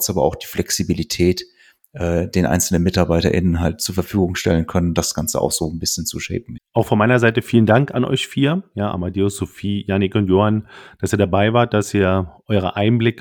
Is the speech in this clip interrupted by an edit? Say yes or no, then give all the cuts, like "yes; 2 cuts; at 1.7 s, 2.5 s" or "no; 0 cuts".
yes; 1 cut; at 6.6 s